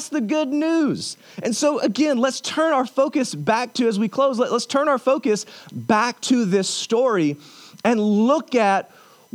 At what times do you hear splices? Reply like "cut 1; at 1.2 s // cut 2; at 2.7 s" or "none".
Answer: none